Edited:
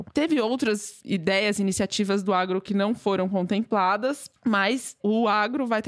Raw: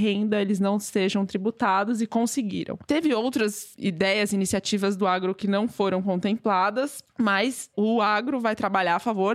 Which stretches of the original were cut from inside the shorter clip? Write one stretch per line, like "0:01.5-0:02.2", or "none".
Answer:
none